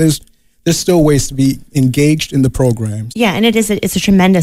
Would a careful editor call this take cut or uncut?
cut